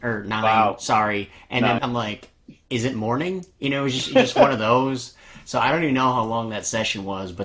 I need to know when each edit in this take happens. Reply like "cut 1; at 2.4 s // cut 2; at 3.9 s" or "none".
cut 1; at 1.8 s